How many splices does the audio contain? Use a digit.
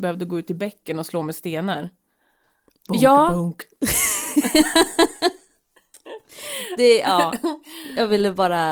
0